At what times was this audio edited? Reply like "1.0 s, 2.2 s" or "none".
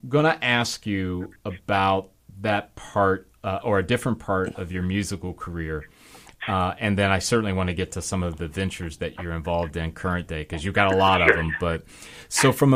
none

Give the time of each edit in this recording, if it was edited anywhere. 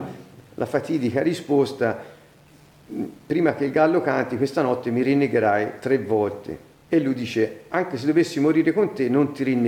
none

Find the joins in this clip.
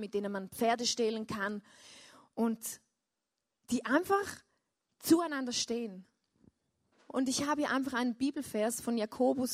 6.9 s

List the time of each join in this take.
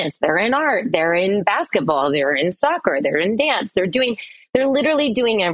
none

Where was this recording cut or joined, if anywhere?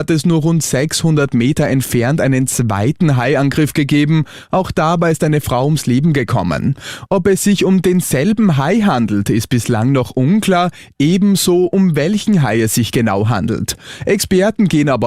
none

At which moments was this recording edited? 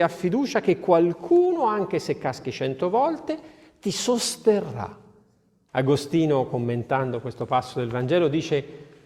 5.7 s

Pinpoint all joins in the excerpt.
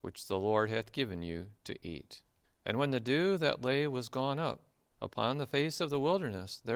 2.4 s, 4.9 s

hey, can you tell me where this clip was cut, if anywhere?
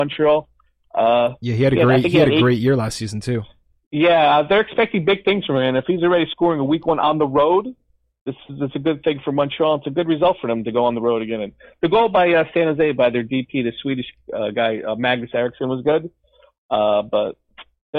none

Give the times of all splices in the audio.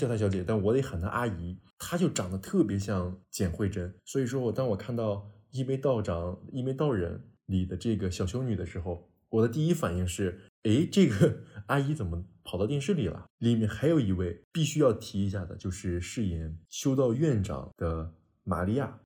13.3 s, 17.1 s

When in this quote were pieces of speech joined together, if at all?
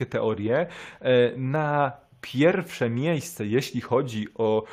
none

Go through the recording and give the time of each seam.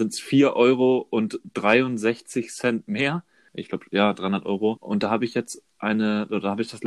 3.5 s, 4.8 s

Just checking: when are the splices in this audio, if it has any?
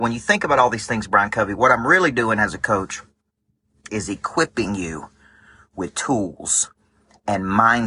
3.9 s

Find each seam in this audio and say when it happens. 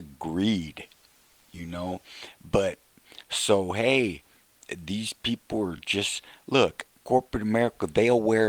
none

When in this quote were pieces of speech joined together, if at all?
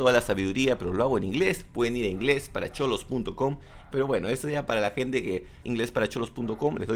3.9 s, 5.6 s

